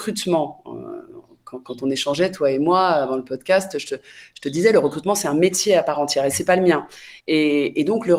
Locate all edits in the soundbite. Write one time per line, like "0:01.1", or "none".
0:07.2